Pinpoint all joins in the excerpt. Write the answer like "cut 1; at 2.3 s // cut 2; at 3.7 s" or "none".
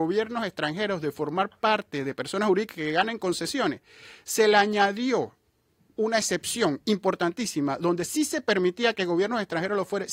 none

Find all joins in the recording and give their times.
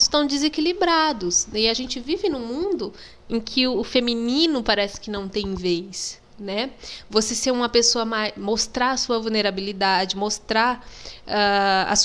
none

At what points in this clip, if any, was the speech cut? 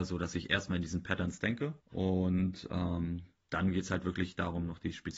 cut 1; at 1.8 s

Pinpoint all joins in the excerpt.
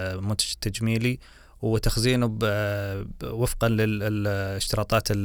none

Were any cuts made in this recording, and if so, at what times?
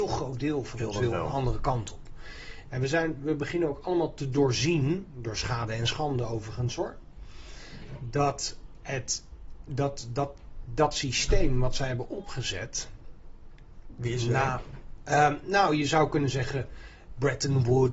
none

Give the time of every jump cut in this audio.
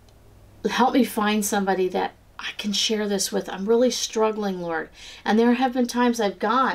none

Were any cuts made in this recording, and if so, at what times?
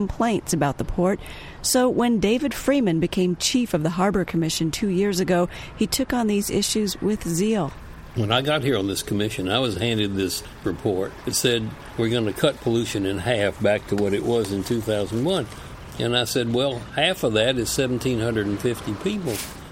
cut 1; at 15.9 s

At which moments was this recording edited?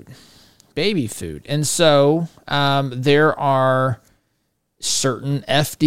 none

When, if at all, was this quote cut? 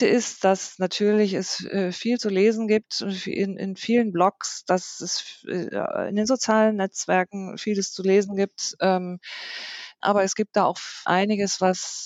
cut 1; at 10.0 s // cut 2; at 11.0 s

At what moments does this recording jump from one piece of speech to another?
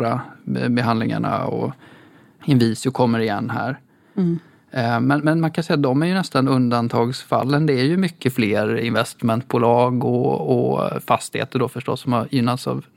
none

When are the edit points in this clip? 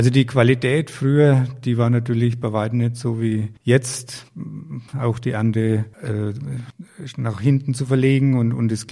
cut 1; at 4.9 s

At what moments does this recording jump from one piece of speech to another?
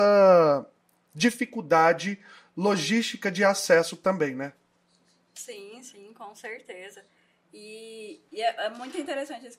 cut 1; at 8.3 s

